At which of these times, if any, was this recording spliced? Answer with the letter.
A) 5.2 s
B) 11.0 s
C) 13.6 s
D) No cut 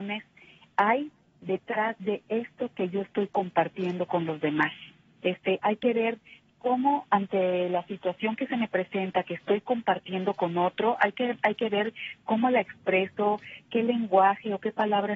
A